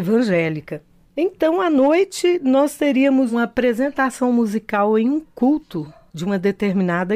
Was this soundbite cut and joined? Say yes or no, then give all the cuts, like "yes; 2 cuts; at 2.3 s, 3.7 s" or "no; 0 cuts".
no; 0 cuts